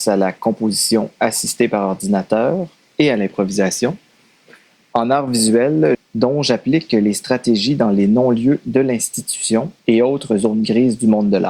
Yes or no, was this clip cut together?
yes